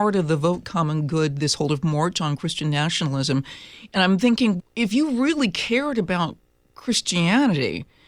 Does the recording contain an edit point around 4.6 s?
yes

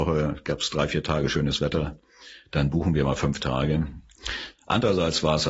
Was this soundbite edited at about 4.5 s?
yes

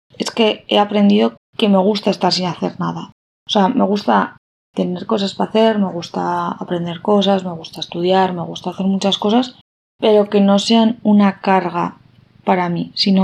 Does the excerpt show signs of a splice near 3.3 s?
no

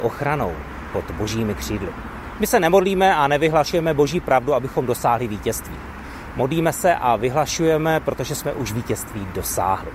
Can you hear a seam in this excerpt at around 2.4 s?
yes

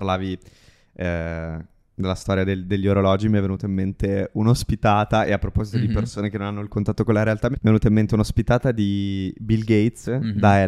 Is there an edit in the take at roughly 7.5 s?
yes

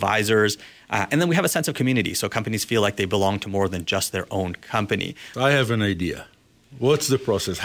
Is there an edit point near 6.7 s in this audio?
no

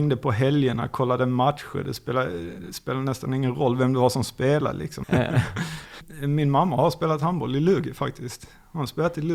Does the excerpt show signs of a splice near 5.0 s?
yes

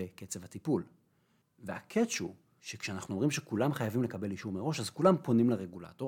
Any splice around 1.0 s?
no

